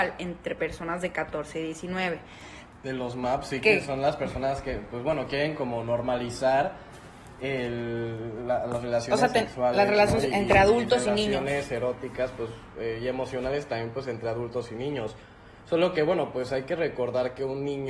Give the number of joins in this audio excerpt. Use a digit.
1